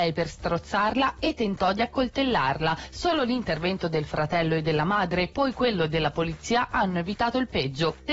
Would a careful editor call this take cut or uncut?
uncut